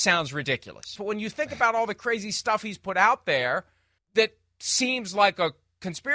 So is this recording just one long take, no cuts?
no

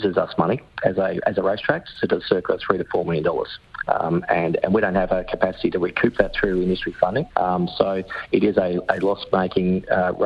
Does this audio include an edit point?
yes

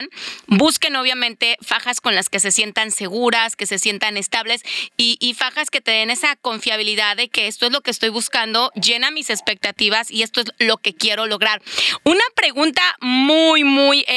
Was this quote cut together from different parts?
no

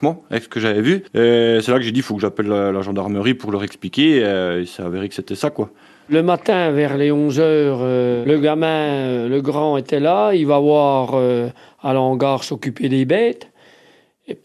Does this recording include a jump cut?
yes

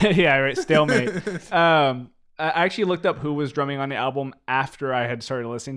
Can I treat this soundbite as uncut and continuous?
yes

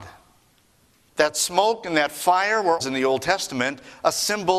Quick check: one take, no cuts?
no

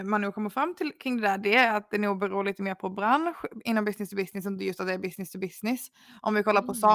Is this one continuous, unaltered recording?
yes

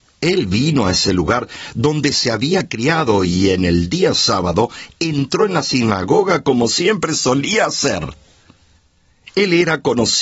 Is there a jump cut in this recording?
no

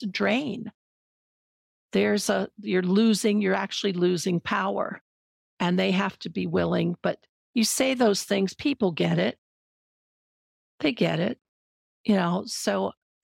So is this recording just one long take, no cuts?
yes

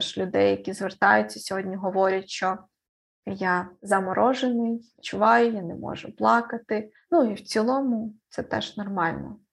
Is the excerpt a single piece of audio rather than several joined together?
yes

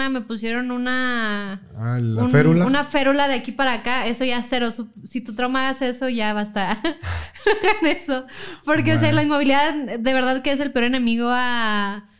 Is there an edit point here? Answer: no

